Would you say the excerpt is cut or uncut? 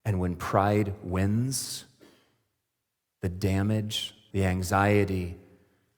cut